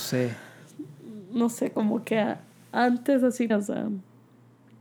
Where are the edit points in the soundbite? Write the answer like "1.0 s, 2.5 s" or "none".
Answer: 3.5 s

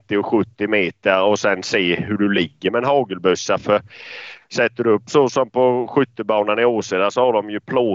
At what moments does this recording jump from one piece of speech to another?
none

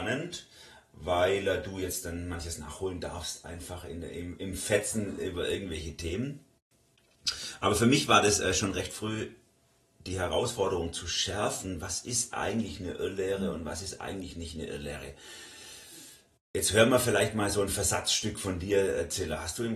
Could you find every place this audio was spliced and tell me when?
none

